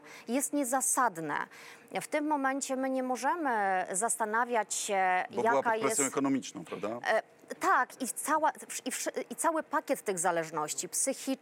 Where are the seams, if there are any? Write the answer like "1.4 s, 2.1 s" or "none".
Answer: none